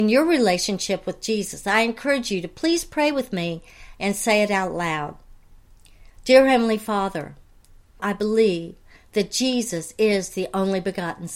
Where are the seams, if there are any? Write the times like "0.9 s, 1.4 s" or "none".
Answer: 8.0 s